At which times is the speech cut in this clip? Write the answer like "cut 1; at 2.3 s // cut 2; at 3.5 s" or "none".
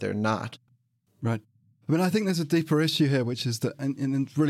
cut 1; at 1.1 s